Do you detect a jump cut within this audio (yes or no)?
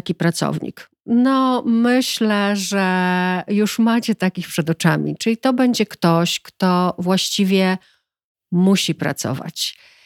no